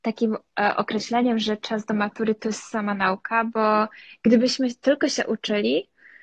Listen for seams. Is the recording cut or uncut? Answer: uncut